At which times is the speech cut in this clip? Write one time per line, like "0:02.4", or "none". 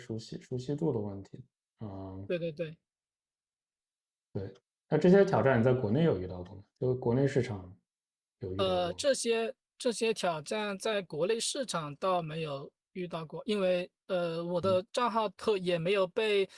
none